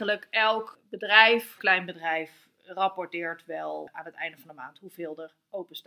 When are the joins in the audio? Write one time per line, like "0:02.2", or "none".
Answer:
0:01.6